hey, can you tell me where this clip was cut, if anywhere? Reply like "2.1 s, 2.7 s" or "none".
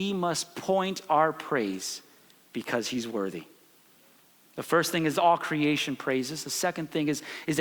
none